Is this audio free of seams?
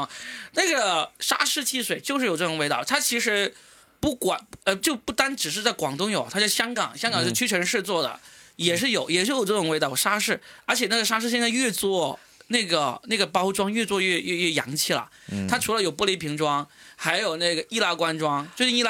yes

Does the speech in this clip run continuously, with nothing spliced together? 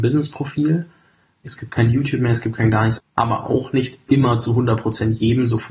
no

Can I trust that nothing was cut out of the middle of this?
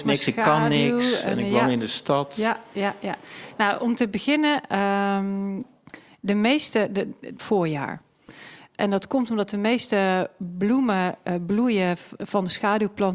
no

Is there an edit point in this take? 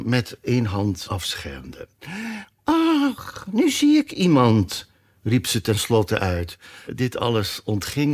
yes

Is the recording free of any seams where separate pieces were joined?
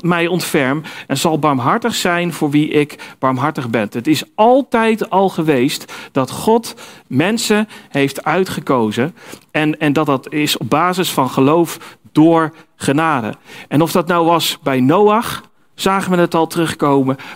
yes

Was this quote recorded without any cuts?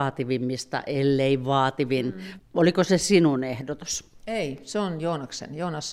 no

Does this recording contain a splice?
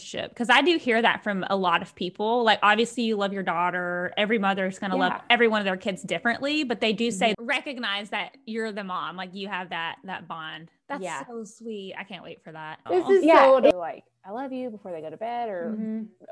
yes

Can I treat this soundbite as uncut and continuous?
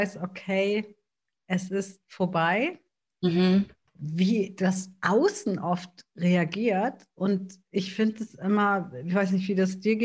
no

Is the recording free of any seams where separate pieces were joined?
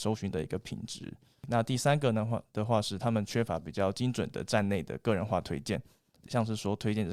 yes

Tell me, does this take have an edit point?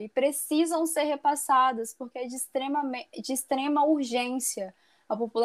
no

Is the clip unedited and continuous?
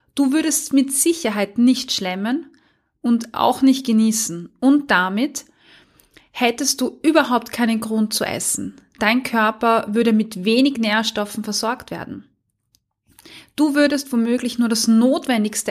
yes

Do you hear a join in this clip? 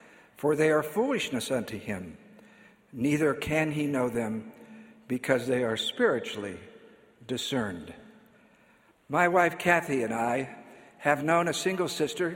no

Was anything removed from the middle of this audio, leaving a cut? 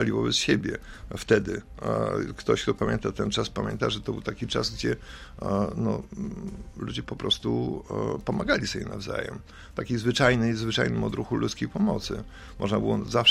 no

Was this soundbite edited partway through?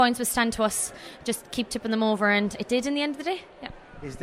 no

